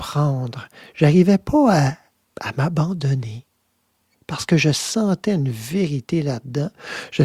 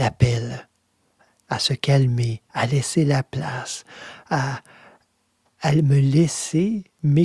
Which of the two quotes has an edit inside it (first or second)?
first